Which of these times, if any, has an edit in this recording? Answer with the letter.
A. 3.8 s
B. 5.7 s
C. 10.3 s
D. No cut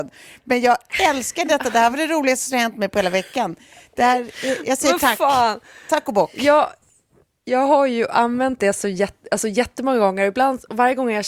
D